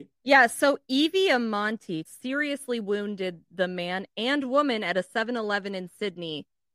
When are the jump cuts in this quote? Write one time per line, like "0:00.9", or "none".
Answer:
0:02.1